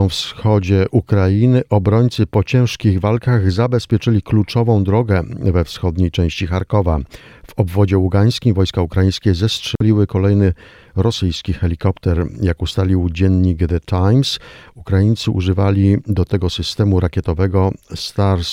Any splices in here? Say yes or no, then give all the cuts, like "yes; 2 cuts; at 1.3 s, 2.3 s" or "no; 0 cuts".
no; 0 cuts